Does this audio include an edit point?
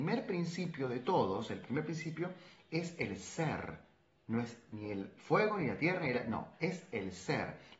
no; 0 cuts

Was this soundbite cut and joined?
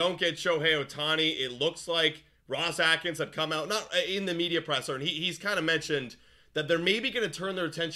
no; 0 cuts

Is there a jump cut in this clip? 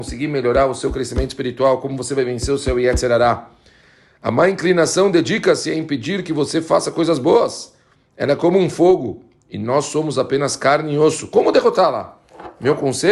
no; 0 cuts

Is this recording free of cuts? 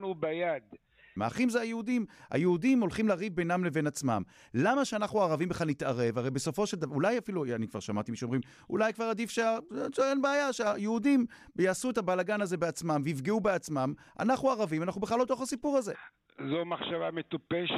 no; 1 cut; at 1.2 s

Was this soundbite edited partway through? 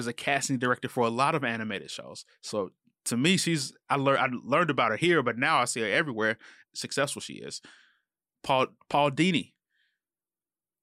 yes; 1 cut; at 6.6 s

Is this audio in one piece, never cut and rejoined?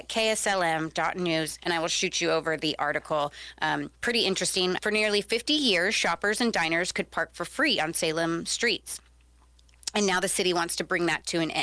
no; 1 cut; at 4.8 s

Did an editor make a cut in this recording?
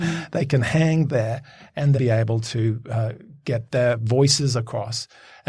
yes; 1 cut; at 1.9 s

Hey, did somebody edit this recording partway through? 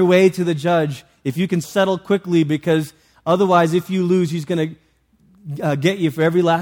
yes; 1 cut; at 1.6 s

